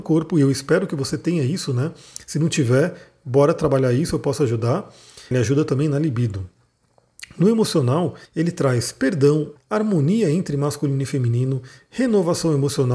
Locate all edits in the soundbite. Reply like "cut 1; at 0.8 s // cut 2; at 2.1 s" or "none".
cut 1; at 5.3 s // cut 2; at 8.3 s // cut 3; at 9.6 s